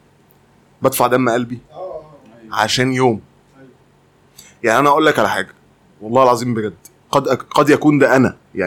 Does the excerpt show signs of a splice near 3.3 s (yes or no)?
no